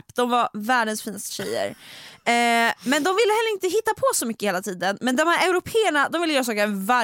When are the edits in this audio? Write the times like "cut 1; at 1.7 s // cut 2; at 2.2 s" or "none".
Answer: none